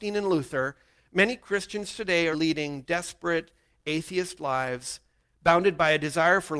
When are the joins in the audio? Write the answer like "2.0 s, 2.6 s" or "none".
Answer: 2.3 s